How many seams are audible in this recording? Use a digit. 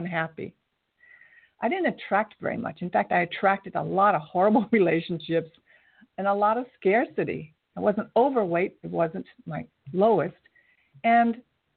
2